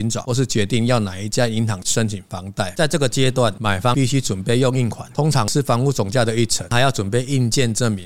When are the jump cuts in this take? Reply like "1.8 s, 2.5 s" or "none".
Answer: none

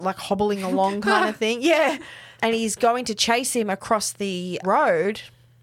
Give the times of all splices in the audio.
2.3 s, 4.6 s

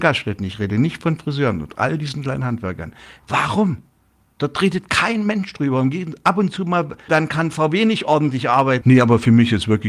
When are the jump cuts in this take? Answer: 3.2 s, 7.1 s, 8.8 s

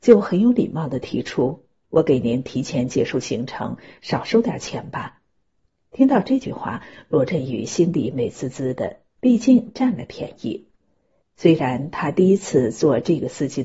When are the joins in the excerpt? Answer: 11.2 s

